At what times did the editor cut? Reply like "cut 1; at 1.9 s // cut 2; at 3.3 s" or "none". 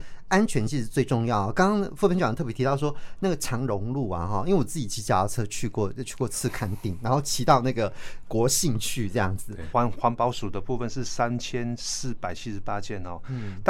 cut 1; at 9.7 s